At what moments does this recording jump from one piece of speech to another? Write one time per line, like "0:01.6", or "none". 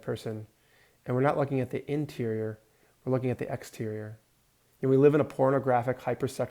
0:04.7